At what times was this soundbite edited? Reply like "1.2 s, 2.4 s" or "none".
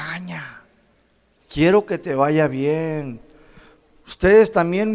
1.4 s

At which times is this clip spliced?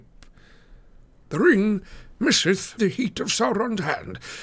1.1 s, 2.8 s

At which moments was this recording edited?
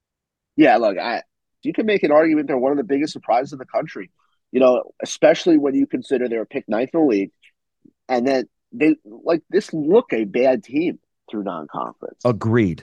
1.6 s, 10.1 s

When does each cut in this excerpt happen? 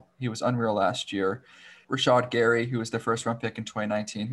1.8 s

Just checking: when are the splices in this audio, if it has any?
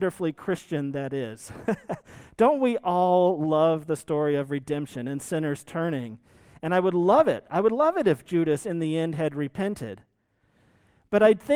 none

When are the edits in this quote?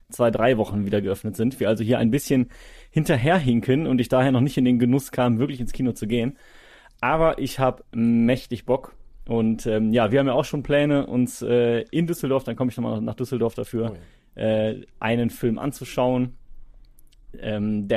none

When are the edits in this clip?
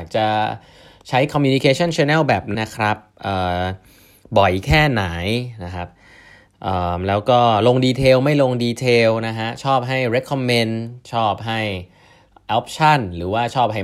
2.5 s

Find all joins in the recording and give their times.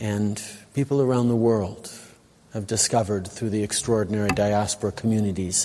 none

